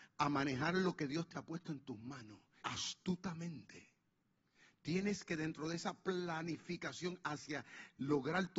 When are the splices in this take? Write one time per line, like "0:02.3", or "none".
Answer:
0:02.6